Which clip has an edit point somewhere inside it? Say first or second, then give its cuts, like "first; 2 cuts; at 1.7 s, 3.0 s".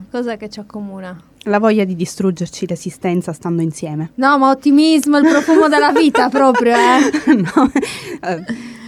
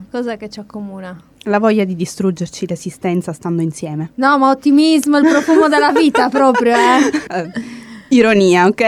second; 1 cut; at 7.3 s